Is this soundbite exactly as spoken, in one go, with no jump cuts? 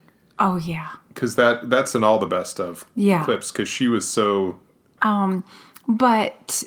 no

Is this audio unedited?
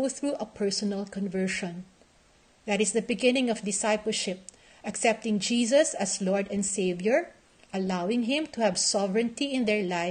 yes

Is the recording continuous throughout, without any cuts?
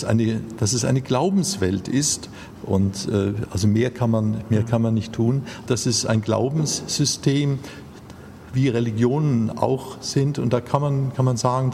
no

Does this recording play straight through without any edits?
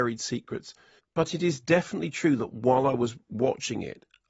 no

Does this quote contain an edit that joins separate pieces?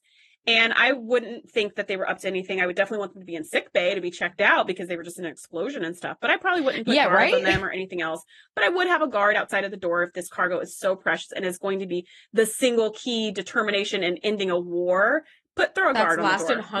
no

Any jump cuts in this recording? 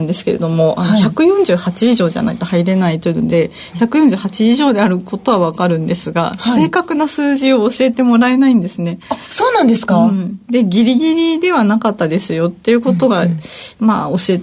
no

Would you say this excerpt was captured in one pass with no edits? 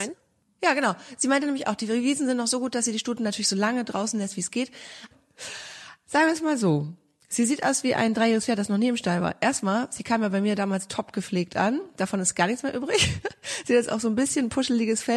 no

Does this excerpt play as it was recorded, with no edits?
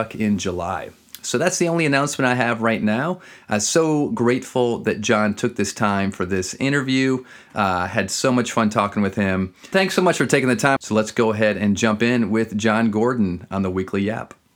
no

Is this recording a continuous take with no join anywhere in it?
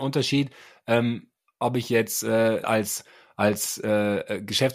no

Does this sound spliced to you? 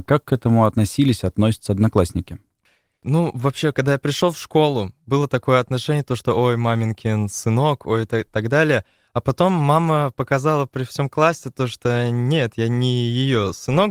no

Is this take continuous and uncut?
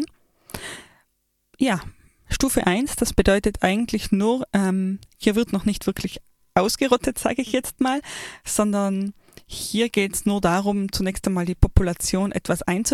yes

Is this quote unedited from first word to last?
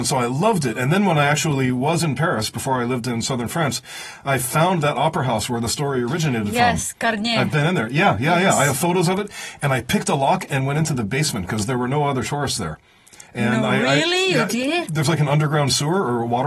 yes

